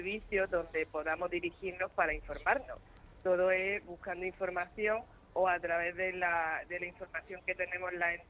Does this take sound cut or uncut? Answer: uncut